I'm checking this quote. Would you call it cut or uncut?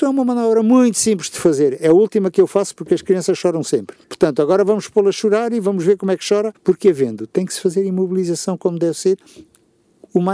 cut